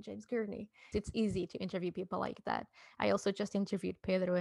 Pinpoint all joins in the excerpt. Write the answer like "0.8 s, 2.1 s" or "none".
0.9 s